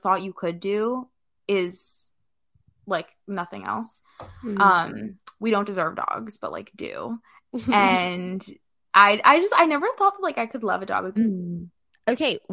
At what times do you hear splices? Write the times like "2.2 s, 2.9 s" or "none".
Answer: 11.2 s